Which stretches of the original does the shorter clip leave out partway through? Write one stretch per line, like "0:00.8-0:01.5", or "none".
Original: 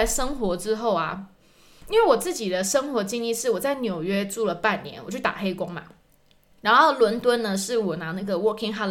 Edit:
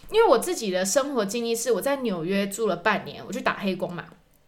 none